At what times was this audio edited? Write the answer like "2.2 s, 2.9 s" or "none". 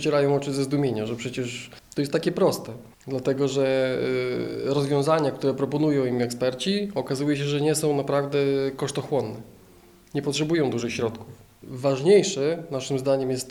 11.6 s

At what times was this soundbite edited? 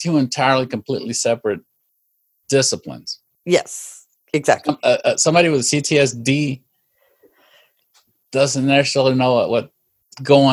none

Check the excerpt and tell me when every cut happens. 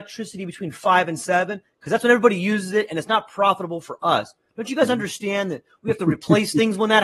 none

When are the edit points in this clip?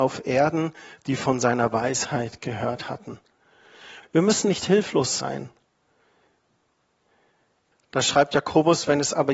4.0 s, 7.7 s

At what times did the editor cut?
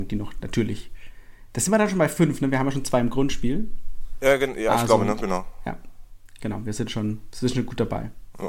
none

